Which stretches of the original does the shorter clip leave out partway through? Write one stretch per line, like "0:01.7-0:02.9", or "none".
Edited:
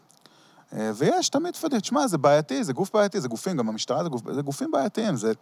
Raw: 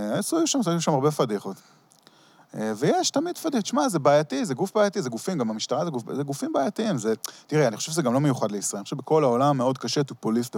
none